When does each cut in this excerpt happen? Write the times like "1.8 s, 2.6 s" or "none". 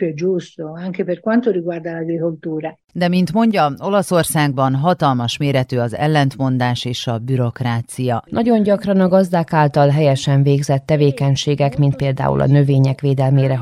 8.3 s